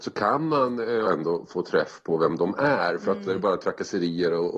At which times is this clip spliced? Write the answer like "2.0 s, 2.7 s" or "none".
1.0 s, 3.3 s